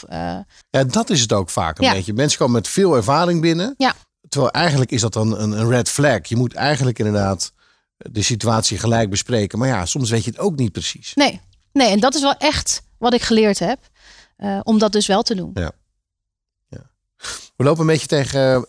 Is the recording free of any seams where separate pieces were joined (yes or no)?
yes